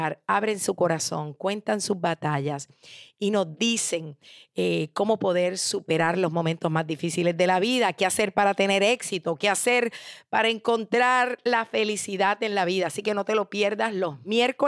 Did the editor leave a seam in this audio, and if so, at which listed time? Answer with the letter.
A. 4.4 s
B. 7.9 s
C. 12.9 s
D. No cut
D